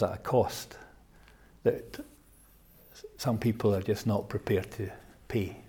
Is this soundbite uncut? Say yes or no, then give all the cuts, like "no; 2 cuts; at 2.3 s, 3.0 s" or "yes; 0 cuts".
yes; 0 cuts